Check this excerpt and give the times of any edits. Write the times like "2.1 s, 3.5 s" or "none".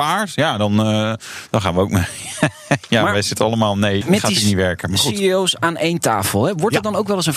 4.0 s